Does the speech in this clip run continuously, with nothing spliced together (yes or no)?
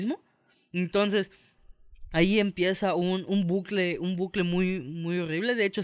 yes